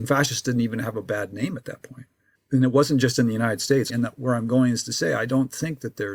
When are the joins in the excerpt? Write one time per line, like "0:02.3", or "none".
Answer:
0:02.3
0:03.9